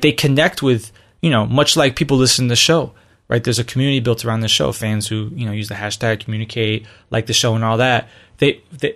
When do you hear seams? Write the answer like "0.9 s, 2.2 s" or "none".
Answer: none